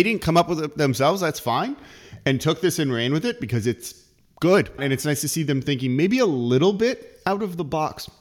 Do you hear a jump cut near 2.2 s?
no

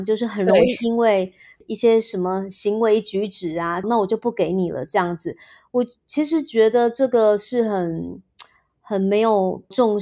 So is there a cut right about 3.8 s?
yes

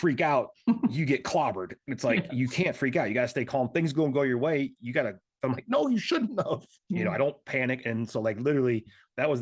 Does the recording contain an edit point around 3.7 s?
no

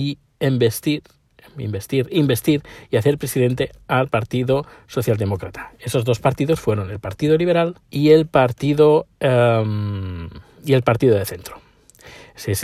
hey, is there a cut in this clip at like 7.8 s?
yes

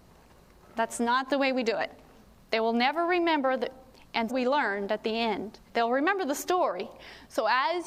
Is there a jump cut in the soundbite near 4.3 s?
yes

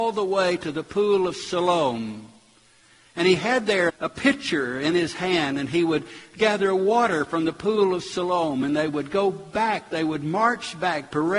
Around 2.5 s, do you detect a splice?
no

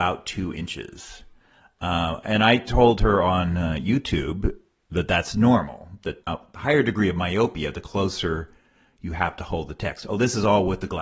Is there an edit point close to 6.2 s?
yes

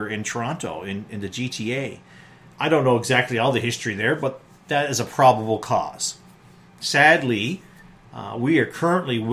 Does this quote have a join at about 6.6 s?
no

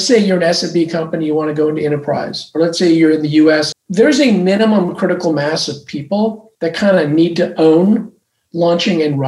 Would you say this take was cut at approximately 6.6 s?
yes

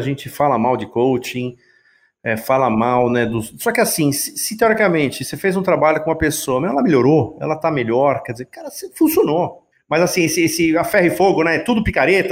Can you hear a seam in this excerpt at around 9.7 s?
yes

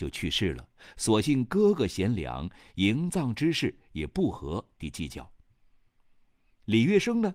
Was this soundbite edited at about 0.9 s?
no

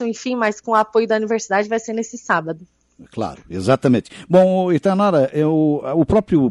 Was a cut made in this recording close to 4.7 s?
no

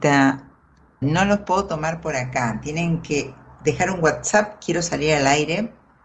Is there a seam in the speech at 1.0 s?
yes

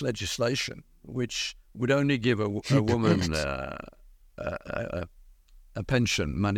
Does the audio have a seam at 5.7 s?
yes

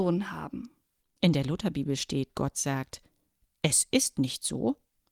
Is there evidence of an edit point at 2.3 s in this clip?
no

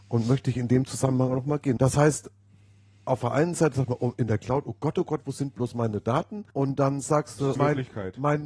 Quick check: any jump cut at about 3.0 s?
no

